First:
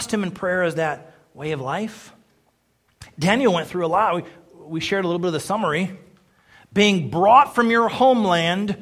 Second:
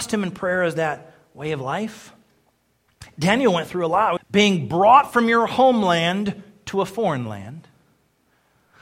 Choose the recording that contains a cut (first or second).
second